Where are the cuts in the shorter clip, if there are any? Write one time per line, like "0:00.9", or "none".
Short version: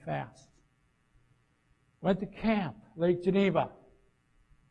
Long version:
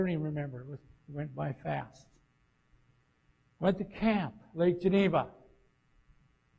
none